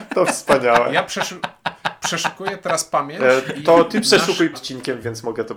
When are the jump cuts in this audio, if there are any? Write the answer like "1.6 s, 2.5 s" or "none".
4.5 s